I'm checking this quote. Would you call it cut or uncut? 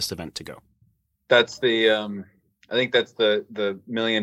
uncut